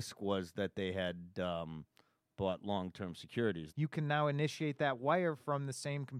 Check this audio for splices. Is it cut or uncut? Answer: cut